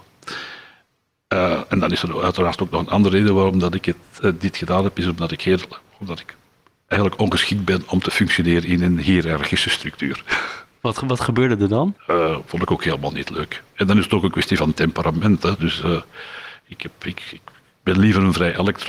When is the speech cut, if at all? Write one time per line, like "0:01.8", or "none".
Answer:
0:12.0